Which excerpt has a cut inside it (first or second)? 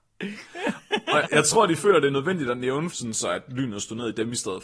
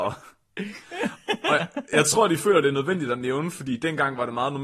first